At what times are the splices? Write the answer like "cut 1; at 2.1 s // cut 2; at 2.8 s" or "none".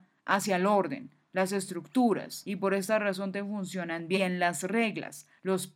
none